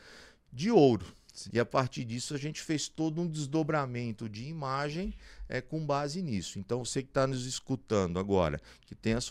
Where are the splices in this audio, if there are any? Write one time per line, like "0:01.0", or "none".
0:01.5